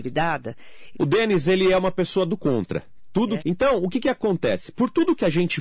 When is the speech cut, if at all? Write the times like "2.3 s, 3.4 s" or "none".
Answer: 0.9 s, 3.4 s